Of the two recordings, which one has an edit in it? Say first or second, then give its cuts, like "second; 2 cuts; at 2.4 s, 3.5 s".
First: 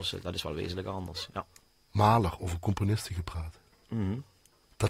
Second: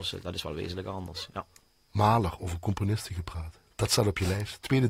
second; 1 cut; at 3.7 s